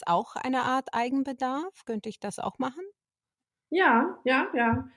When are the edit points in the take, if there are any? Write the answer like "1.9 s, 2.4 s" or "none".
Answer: none